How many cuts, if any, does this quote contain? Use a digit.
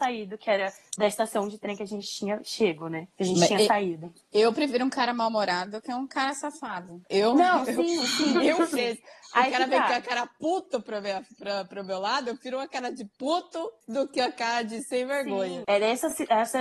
2